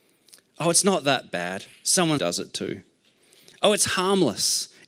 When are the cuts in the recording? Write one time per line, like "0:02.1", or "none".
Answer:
0:02.2